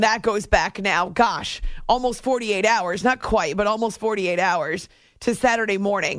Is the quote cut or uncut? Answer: uncut